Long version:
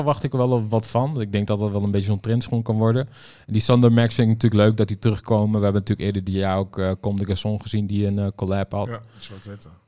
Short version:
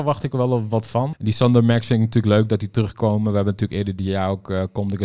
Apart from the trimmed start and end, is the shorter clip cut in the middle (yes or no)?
yes